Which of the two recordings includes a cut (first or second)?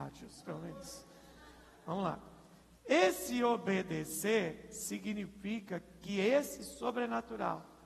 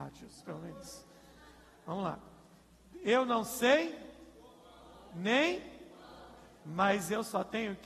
first